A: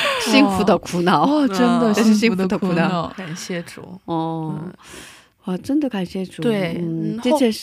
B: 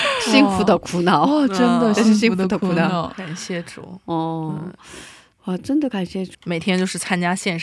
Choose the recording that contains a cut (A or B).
B